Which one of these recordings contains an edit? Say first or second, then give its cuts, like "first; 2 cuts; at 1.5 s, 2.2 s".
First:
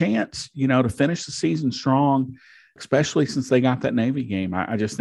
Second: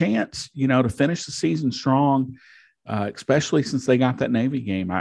first; 1 cut; at 2.8 s